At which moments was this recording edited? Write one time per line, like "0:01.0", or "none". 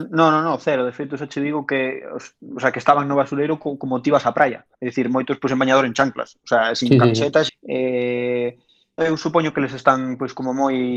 0:07.5
0:09.0